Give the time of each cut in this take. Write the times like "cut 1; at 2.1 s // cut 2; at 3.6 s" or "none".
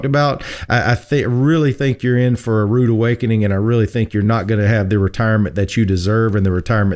none